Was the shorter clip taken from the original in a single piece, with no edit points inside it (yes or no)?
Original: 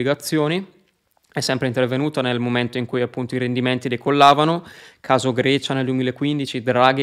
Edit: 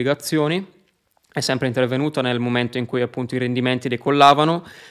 yes